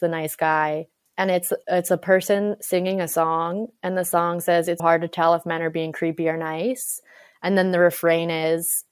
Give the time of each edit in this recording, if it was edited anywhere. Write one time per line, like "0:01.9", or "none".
0:04.8